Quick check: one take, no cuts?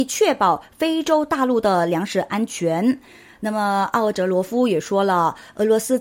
yes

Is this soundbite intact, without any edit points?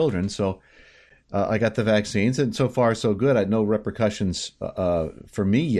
yes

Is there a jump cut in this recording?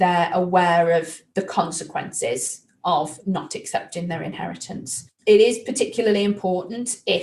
no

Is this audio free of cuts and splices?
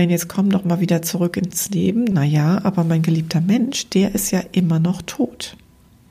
no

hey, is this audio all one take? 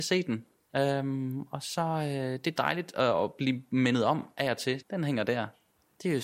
no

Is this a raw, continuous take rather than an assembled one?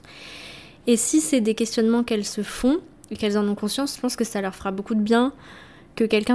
yes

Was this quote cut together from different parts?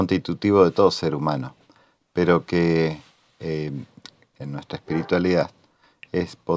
yes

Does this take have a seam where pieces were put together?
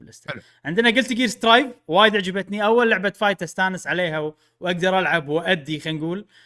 no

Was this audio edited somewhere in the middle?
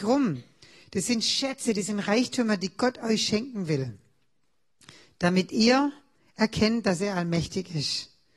no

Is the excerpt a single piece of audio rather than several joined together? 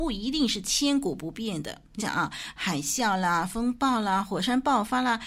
no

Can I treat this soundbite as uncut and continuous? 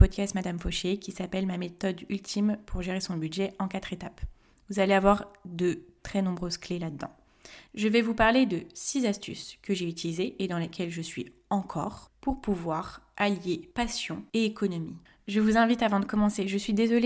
no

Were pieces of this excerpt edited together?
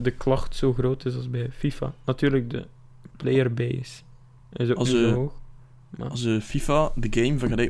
no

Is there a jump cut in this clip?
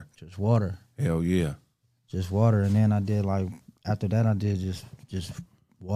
no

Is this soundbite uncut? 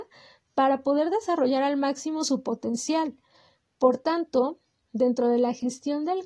yes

